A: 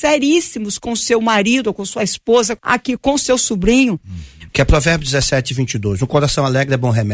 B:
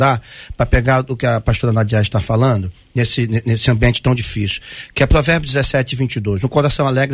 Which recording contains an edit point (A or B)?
A